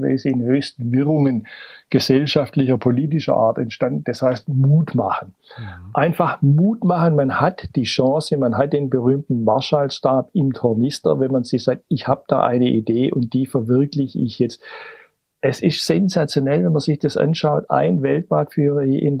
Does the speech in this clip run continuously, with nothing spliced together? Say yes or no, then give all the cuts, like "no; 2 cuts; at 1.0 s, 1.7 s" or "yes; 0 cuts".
yes; 0 cuts